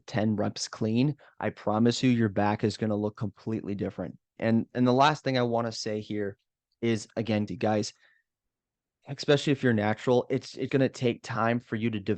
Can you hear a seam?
yes; 3 cuts; at 4.4 s, 7.5 s, 10.7 s

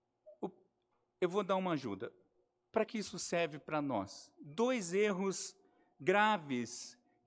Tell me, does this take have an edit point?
yes; 1 cut; at 2.9 s

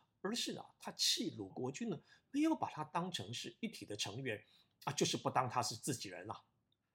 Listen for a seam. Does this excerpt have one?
yes; 1 cut; at 1.5 s

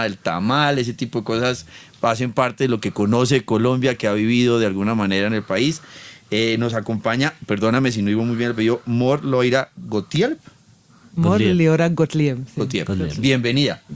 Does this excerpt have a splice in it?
no; 0 cuts

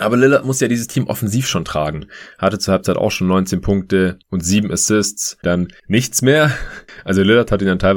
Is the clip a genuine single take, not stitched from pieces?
no; 1 cut; at 5.4 s

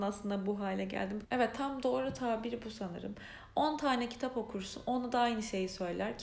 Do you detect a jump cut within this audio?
yes; 1 cut; at 1.2 s

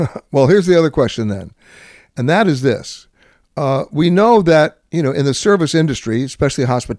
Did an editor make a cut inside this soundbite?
no; 0 cuts

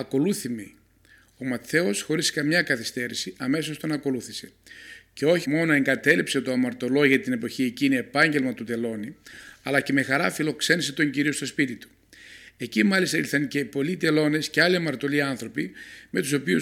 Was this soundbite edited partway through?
yes; 1 cut; at 5.4 s

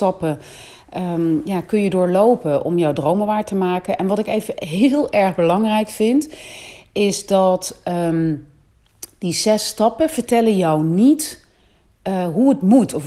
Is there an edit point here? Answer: no; 0 cuts

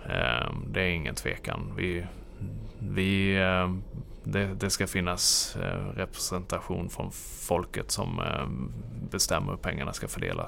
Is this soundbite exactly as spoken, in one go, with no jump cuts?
yes; 0 cuts

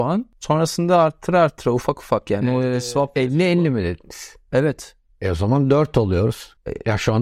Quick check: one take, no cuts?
yes; 0 cuts

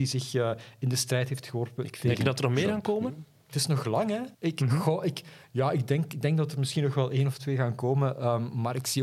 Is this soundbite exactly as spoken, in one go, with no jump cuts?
no; 1 cut; at 4.3 s

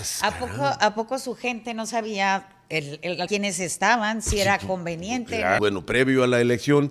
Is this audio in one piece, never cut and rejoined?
no; 2 cuts; at 3.3 s, 5.6 s

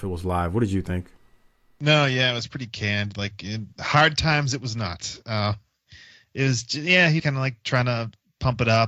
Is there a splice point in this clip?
yes; 1 cut; at 7.2 s

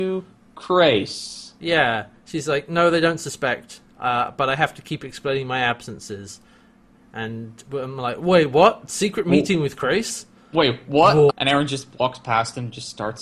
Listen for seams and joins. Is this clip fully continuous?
no; 1 cut; at 11.3 s

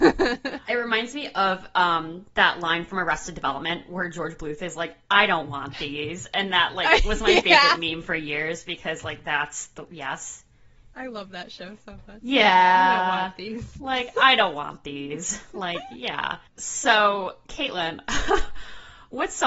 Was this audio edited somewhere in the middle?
yes; 1 cut; at 16.5 s

